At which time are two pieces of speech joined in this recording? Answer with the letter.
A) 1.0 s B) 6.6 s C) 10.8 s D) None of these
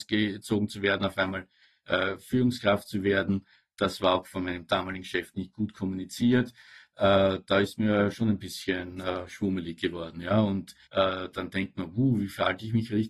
C